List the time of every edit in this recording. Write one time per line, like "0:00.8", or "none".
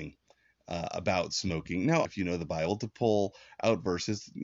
0:02.1